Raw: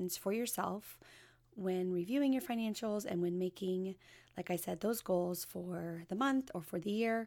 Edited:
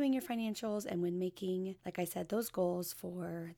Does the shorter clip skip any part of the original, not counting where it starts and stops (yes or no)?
yes